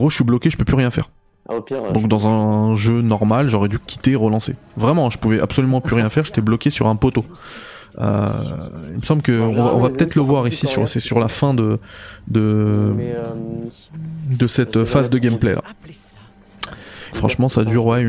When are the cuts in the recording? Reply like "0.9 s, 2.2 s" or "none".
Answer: 17.1 s